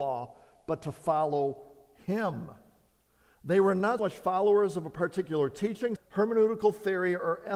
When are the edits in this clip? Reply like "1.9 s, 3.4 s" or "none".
4.0 s, 6.0 s